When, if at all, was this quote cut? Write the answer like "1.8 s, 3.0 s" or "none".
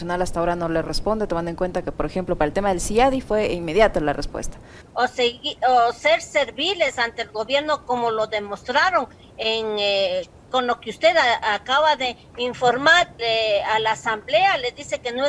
4.8 s, 13.2 s